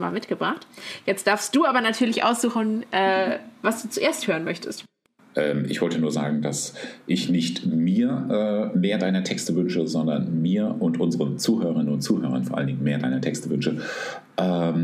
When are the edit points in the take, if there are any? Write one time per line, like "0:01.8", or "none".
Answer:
none